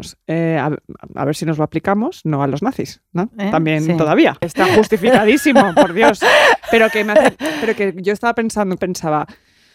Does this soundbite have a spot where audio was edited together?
yes; 2 cuts; at 4.4 s, 8.8 s

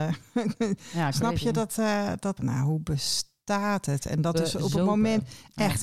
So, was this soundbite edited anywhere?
yes; 1 cut; at 2.4 s

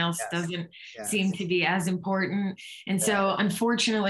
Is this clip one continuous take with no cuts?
yes; 0 cuts

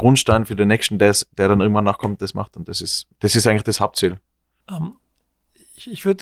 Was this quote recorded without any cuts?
yes; 0 cuts

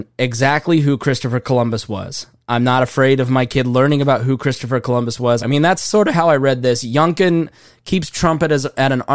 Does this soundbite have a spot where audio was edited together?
yes; 1 cut; at 5.4 s

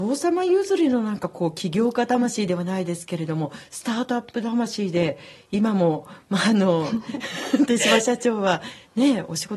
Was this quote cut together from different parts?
no; 0 cuts

